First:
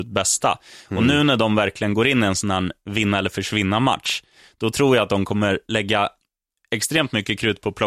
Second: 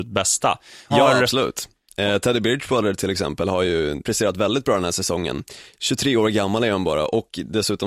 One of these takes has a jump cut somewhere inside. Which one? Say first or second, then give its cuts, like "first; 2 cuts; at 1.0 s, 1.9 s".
second; 2 cuts; at 0.9 s, 4.0 s